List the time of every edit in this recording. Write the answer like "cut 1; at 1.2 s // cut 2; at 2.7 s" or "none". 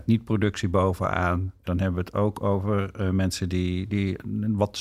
cut 1; at 3.9 s

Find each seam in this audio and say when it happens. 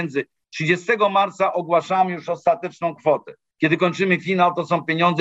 cut 1; at 3.5 s

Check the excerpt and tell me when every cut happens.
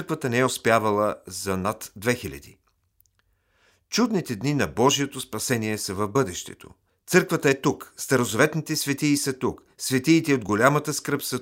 cut 1; at 6.9 s

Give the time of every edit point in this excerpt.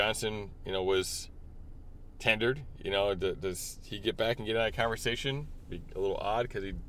none

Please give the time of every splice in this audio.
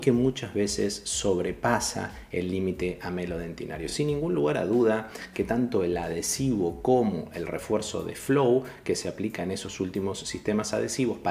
none

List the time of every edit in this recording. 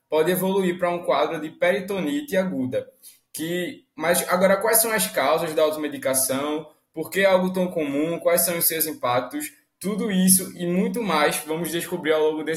none

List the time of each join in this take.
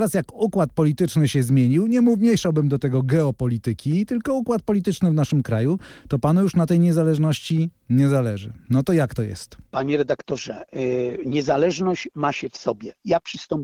cut 1; at 9.7 s

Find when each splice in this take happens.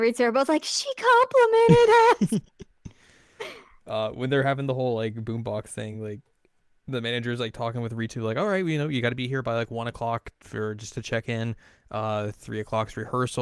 none

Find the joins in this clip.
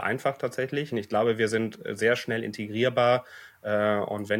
cut 1; at 0.9 s

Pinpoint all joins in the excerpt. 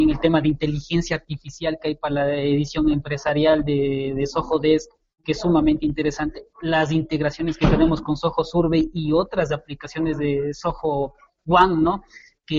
none

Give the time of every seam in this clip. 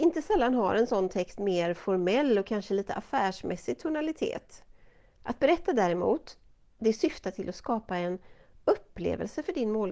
cut 1; at 5.2 s

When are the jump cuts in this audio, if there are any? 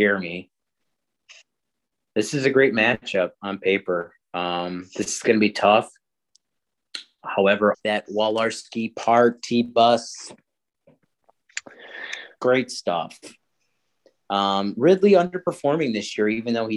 cut 1; at 7.7 s // cut 2; at 12.4 s

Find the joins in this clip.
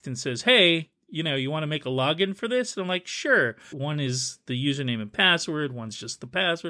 cut 1; at 3.7 s

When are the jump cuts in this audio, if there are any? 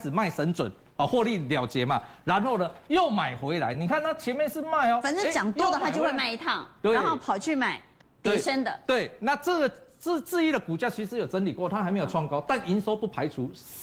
none

